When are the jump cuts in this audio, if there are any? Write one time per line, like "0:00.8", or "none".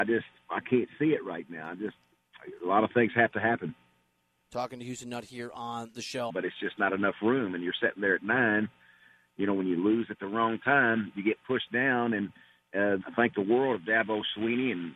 0:06.3
0:13.0